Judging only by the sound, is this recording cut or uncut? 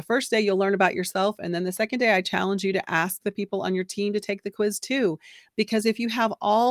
uncut